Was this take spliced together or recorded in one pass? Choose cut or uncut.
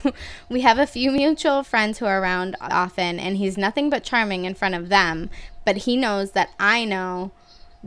cut